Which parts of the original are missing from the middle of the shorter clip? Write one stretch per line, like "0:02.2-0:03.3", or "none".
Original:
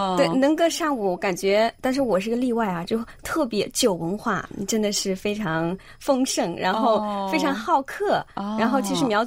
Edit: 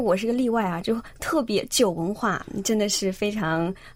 none